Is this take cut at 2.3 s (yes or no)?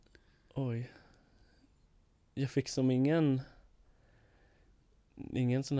no